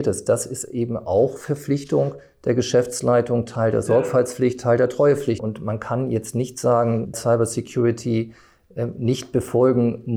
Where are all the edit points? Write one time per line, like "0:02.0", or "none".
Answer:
0:05.4
0:07.1

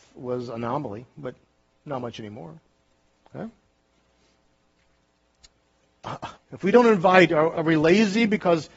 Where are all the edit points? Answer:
0:06.3
0:07.5

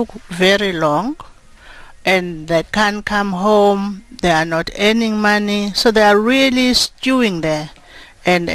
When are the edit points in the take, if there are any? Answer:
none

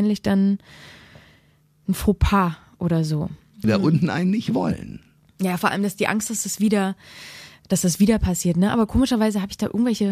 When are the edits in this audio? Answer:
0:03.6

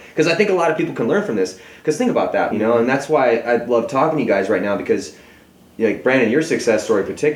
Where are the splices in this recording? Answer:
0:02.5

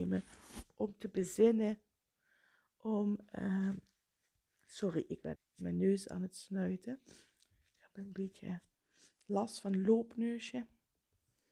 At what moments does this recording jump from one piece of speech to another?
0:05.4

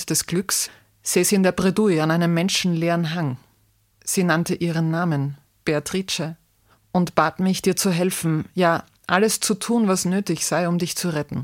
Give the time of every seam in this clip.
none

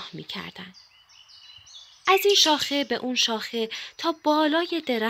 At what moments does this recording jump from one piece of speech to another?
0:02.0

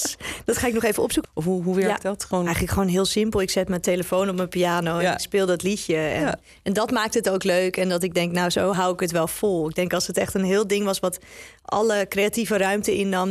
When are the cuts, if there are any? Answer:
0:01.2

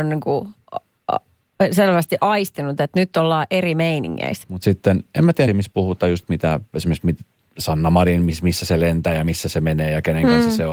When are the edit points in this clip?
0:04.4
0:05.5

